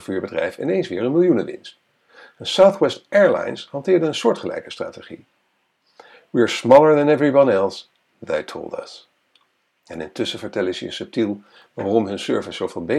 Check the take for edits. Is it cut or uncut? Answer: uncut